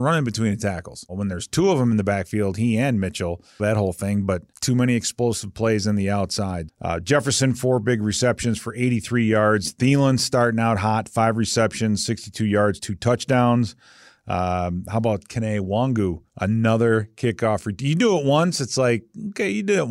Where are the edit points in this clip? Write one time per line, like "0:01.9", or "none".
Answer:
0:03.6
0:06.7
0:16.3